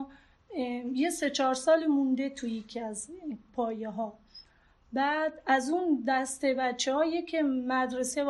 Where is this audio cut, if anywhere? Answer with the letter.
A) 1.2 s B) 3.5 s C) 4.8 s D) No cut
B